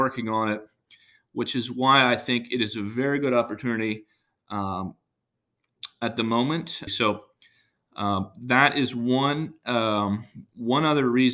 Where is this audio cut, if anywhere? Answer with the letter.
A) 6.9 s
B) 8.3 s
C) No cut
A